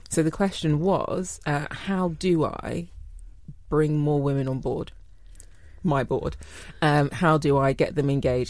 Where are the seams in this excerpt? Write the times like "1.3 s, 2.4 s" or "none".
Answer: none